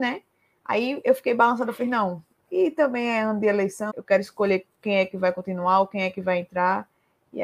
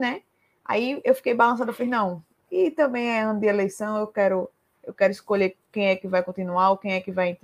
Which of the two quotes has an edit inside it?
first; 1 cut; at 3.9 s

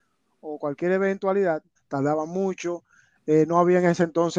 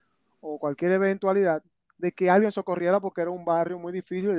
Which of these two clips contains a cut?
first; 1 cut; at 1.8 s

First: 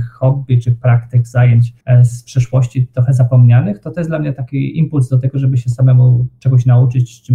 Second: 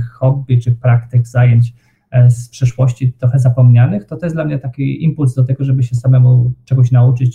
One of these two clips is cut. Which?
first; 1 cut; at 1.8 s

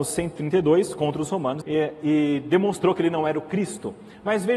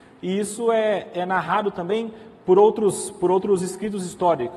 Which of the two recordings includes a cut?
first; 1 cut; at 1.6 s

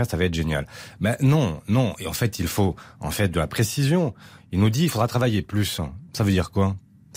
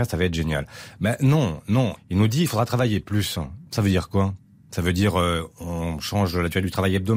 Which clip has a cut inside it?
second; 1 cut; at 2.0 s

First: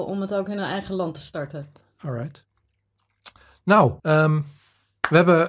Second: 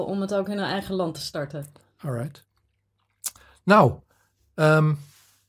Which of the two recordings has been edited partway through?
first; 1 cut; at 4.0 s

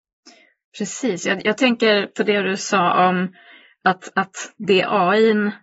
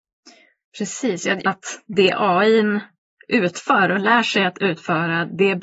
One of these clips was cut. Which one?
second; 1 cut; at 1.4 s

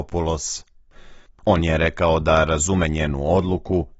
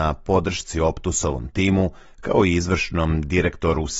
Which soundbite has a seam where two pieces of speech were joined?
first; 1 cut; at 1.3 s

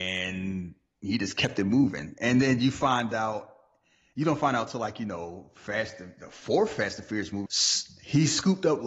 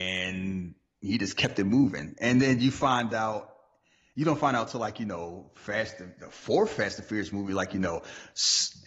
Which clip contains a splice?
first; 1 cut; at 7.5 s

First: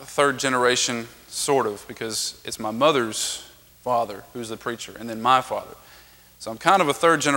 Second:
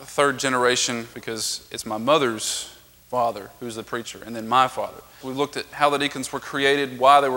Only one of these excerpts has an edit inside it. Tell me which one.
second; 2 cuts; at 1.1 s, 5.2 s

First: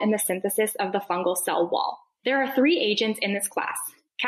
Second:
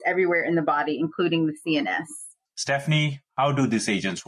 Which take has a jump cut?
second; 1 cut; at 2.5 s

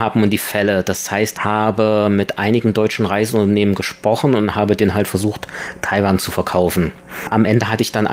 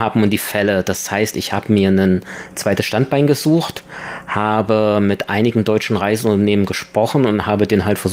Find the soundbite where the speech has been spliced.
first; 1 cut; at 1.3 s

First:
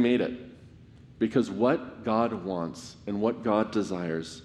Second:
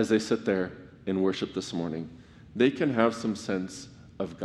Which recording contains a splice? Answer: first; 1 cut; at 1.0 s

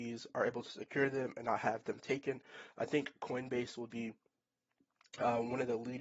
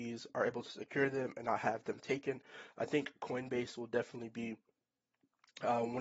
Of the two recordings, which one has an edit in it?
first; 1 cut; at 3.9 s

